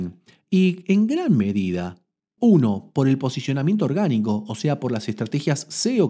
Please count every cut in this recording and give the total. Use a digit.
1